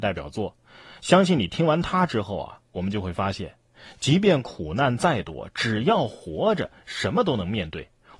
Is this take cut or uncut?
uncut